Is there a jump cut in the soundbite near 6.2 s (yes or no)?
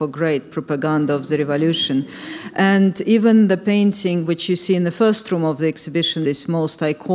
yes